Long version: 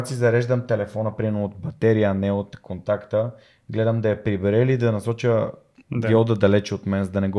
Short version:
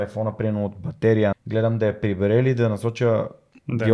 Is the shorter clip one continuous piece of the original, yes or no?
no